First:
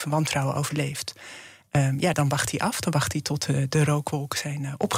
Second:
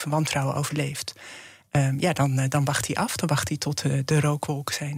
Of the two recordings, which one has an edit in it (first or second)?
first